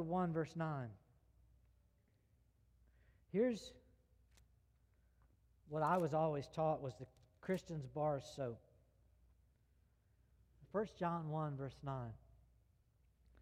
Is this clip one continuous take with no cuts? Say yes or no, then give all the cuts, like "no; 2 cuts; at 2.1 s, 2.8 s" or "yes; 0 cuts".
no; 1 cut; at 10.6 s